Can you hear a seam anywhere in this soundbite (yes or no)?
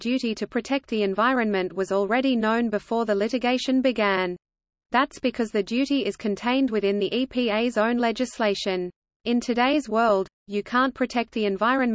yes